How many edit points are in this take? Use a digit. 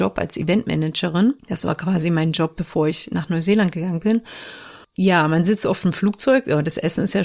1